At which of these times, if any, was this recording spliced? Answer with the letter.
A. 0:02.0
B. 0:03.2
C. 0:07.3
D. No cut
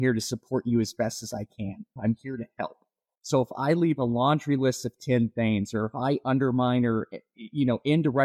A